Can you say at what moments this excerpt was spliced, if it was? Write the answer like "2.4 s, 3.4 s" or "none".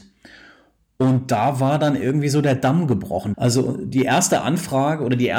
3.3 s